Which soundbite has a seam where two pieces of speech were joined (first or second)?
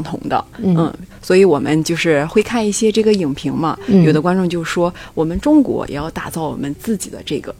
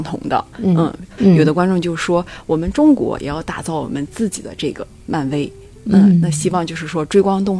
second